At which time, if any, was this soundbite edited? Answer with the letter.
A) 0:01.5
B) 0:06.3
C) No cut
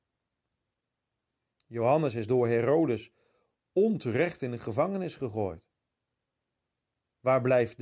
C